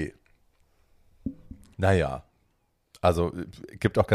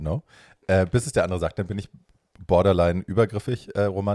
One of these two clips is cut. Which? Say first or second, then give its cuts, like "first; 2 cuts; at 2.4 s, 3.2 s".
first; 1 cut; at 1.7 s